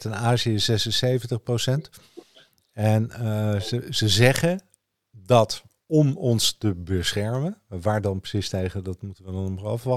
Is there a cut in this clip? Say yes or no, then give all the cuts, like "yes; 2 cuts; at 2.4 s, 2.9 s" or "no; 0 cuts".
no; 0 cuts